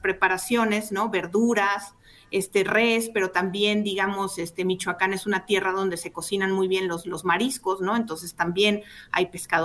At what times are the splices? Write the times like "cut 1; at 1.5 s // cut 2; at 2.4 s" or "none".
none